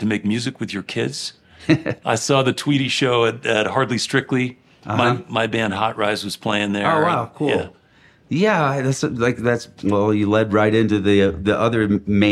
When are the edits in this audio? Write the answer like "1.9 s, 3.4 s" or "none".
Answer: none